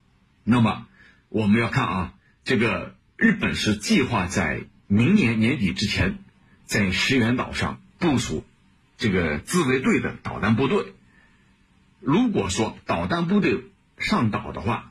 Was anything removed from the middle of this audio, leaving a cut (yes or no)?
no